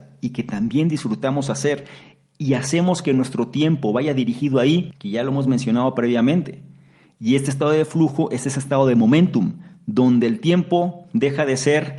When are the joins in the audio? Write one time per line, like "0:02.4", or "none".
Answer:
0:04.9